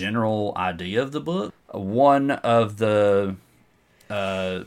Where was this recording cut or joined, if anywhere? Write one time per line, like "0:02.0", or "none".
0:01.5